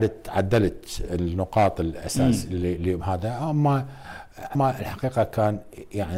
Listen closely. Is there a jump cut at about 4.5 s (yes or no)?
yes